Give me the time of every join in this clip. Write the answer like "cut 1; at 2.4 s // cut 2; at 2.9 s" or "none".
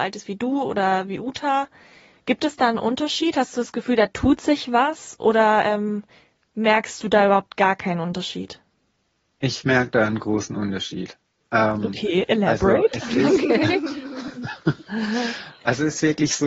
none